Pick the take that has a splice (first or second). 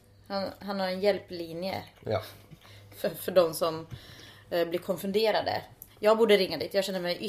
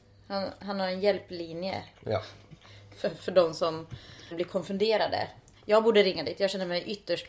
second